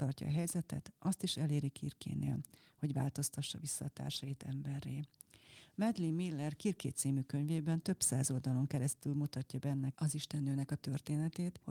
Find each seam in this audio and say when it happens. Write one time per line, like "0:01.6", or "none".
none